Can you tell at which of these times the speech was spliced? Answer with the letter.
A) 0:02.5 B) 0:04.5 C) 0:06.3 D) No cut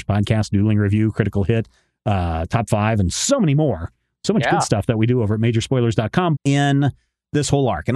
C